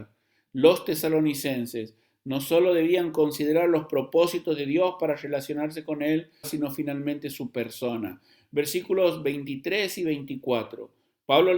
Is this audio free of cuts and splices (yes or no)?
no